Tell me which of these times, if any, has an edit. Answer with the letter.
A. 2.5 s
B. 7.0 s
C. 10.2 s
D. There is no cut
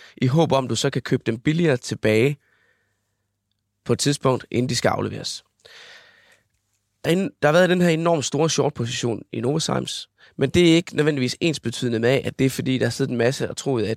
B